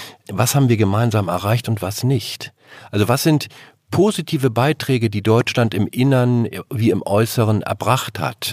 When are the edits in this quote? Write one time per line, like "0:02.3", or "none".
none